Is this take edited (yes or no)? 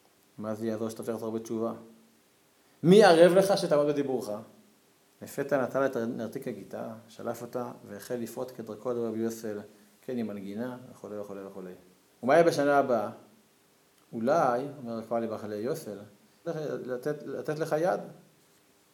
yes